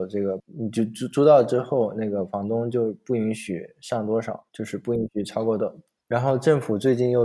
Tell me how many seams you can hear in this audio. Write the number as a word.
three